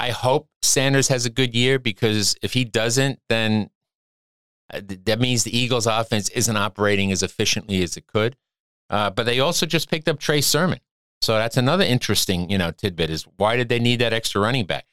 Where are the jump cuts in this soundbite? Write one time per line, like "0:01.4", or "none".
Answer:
none